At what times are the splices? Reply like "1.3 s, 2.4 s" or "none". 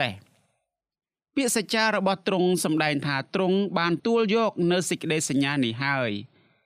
4.0 s